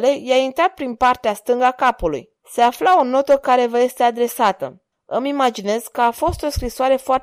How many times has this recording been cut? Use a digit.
2